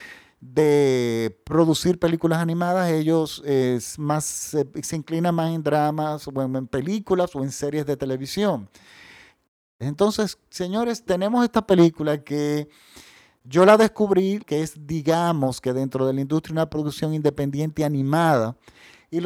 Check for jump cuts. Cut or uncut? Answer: cut